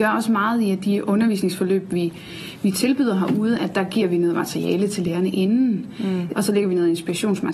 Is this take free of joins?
no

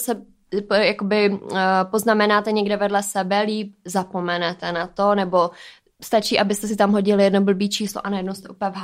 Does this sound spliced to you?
no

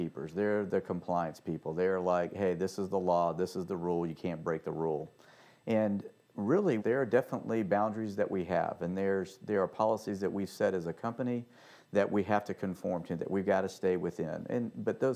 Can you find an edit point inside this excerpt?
yes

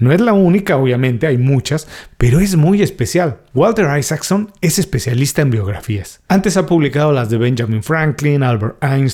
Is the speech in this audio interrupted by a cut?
no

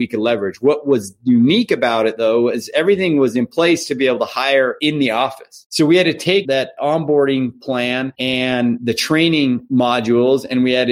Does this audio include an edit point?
no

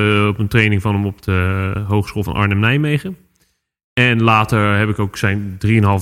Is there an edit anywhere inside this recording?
no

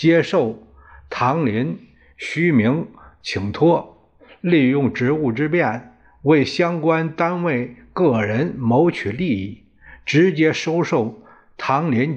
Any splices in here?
no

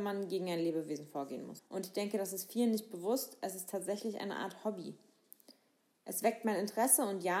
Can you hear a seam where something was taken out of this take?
yes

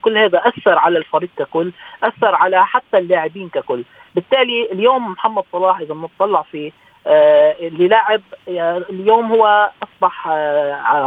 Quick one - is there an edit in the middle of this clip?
yes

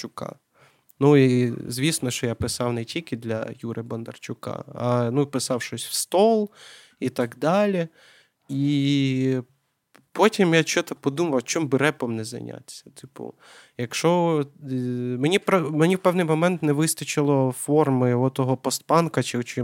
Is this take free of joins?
yes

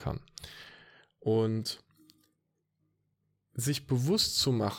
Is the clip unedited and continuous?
yes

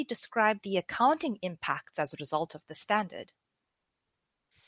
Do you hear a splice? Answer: no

